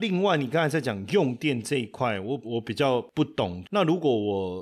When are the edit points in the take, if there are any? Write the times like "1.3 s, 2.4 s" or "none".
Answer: 2.4 s, 3.6 s

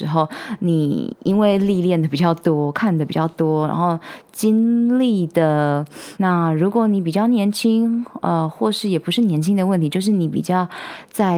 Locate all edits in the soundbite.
6.2 s

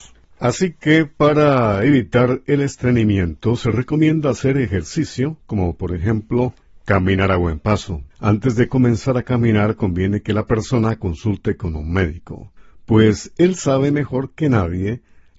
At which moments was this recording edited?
8.1 s

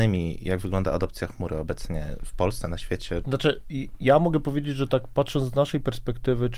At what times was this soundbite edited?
3.2 s

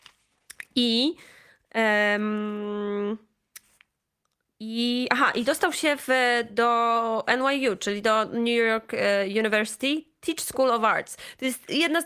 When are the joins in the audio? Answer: none

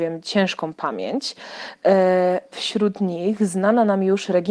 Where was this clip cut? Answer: 2.5 s

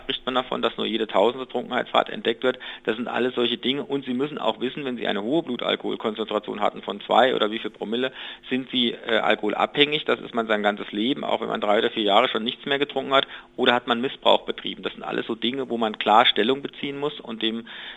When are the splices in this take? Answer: none

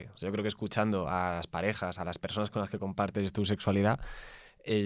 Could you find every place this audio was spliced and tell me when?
none

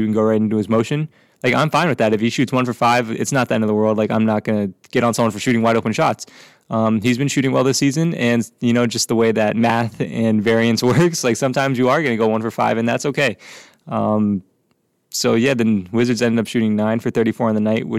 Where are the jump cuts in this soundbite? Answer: none

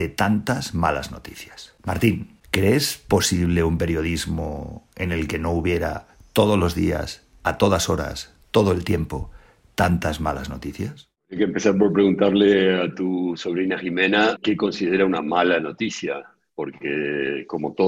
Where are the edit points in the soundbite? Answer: none

